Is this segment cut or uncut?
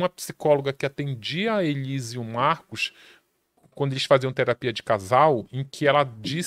uncut